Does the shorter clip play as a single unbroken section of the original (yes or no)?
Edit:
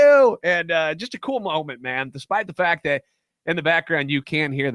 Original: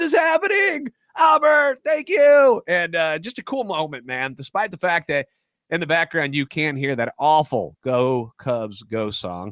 yes